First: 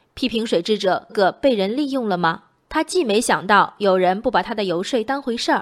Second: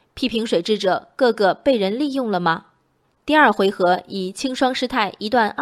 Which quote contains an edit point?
first; 2 cuts; at 1.1 s, 2.6 s

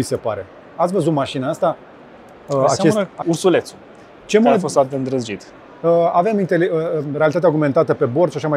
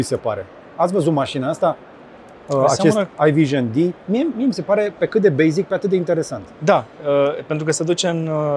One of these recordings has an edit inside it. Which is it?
first; 1 cut; at 3.2 s

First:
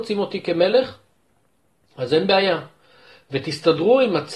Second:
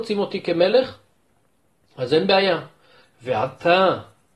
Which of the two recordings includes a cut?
second; 1 cut; at 3.0 s

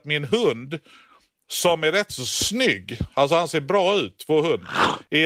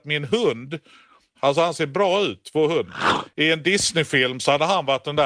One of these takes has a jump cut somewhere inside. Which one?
second; 1 cut; at 1.3 s

